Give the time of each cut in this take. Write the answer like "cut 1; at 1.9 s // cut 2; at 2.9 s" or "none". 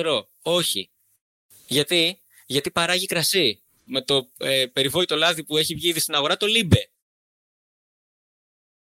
cut 1; at 3.9 s